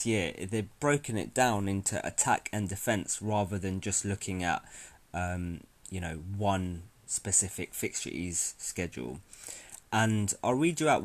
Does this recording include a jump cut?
no; 0 cuts

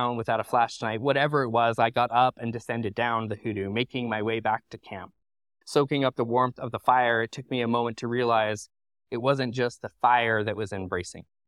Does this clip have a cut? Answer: yes; 1 cut; at 5.6 s

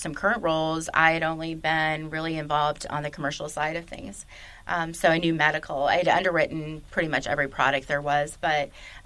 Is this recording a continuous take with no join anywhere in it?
yes; 0 cuts

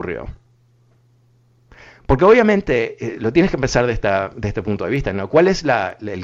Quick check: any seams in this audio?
no; 0 cuts

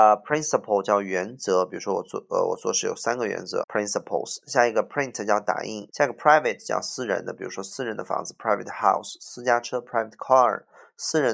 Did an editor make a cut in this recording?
yes; 2 cuts; at 3.6 s, 5.9 s

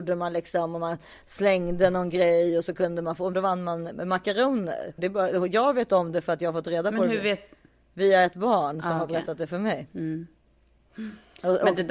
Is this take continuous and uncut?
no; 2 cuts; at 3.3 s, 5.0 s

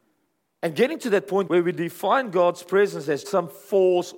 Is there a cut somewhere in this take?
yes; 2 cuts; at 1.5 s, 3.2 s

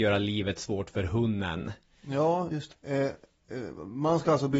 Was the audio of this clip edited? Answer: yes; 1 cut; at 2.7 s

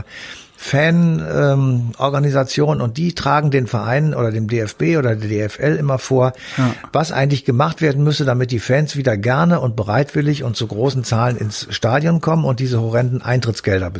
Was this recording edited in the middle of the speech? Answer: no; 0 cuts

